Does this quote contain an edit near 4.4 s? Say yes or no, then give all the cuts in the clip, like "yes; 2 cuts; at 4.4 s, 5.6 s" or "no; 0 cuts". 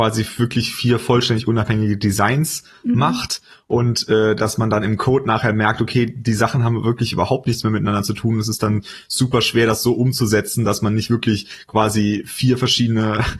no; 0 cuts